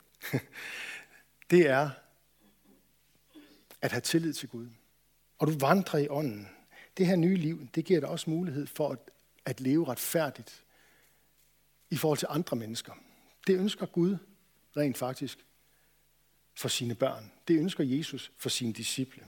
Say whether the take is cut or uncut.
cut